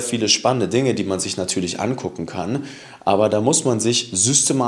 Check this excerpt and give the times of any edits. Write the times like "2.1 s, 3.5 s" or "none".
none